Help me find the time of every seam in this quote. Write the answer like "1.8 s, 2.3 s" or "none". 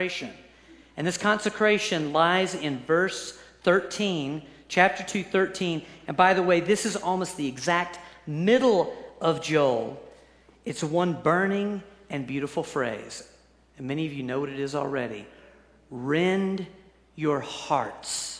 none